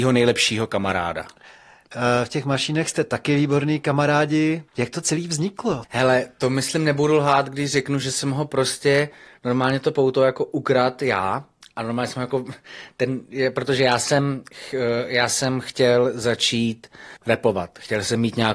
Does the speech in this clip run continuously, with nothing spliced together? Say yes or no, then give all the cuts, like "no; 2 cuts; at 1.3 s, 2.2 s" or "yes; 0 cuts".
no; 3 cuts; at 4.7 s, 5.8 s, 17.2 s